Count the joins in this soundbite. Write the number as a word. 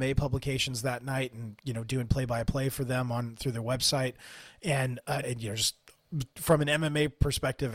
one